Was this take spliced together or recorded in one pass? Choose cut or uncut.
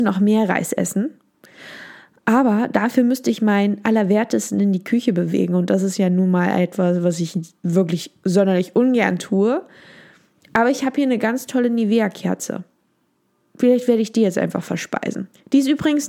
uncut